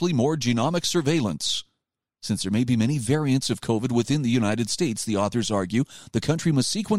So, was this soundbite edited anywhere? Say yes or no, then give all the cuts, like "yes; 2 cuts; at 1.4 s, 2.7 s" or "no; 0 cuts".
no; 0 cuts